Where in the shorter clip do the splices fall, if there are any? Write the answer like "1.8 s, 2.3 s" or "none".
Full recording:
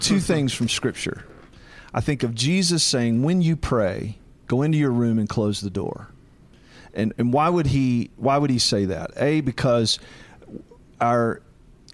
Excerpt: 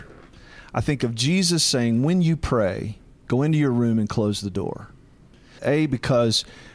5.6 s

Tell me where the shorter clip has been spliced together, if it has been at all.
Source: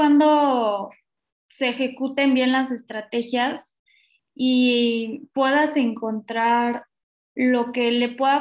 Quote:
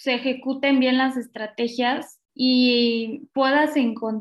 2.3 s

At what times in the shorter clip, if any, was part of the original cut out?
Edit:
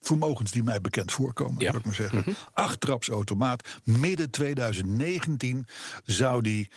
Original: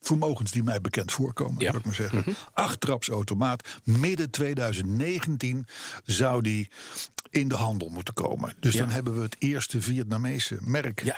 none

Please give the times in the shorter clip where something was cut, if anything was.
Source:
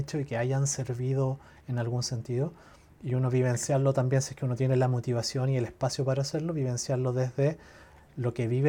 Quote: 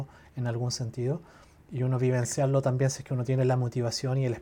none

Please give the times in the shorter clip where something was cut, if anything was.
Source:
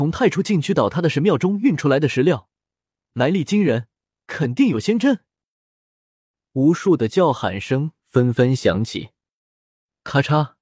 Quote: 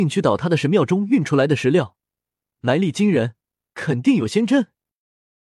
none

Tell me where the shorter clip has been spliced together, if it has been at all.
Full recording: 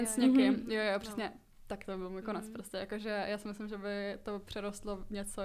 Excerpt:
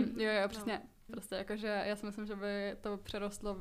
1.1 s

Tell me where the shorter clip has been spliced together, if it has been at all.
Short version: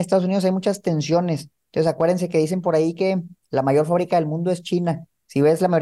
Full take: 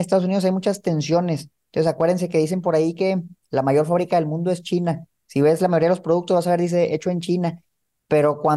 none

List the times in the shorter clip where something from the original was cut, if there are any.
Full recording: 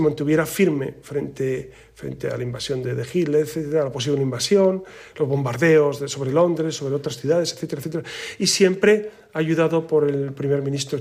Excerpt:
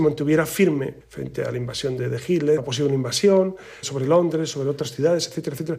1.0 s, 2.6 s, 3.8 s

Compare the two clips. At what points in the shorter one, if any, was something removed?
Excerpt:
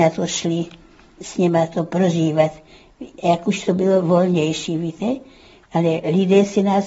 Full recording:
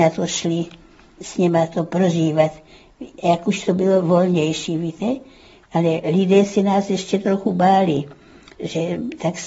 none

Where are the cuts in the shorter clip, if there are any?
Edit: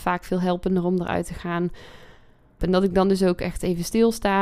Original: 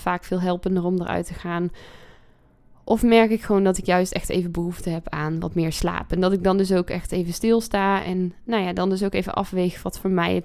2.6 s

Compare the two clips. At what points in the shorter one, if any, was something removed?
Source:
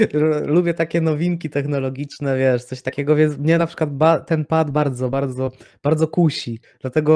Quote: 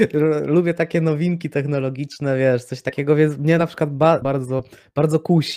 4.2 s

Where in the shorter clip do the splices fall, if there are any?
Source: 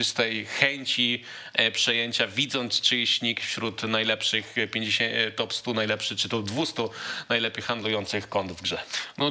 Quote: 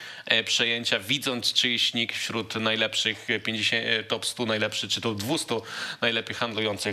none

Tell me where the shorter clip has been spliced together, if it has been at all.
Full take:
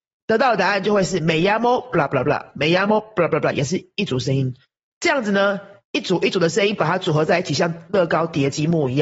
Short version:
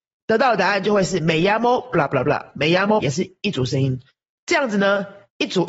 3.0 s

